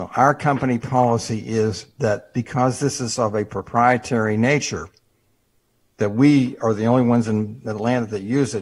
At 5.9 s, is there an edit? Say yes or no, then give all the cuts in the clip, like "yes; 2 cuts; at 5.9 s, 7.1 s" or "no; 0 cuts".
no; 0 cuts